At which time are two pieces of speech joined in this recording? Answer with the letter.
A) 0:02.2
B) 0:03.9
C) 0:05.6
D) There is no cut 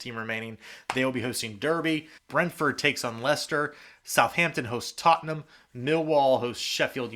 A